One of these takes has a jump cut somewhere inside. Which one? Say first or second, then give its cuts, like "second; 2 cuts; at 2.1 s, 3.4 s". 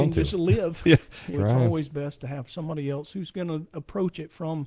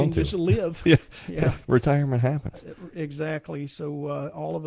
first; 1 cut; at 1.3 s